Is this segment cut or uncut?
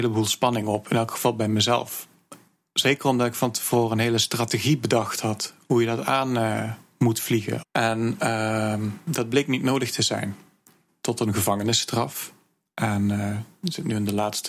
cut